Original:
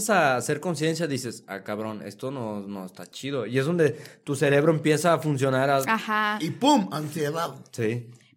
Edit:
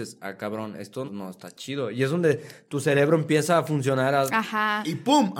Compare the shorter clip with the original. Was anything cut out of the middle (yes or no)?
yes